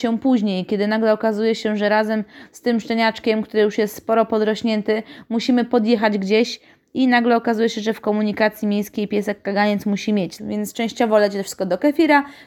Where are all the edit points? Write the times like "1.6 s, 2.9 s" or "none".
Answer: 10.4 s